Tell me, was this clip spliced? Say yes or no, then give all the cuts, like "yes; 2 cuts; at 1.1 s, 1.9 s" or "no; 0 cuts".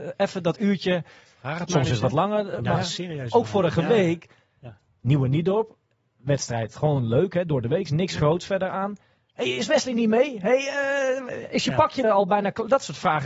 yes; 1 cut; at 12.0 s